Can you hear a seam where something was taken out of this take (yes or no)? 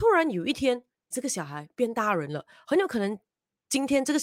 yes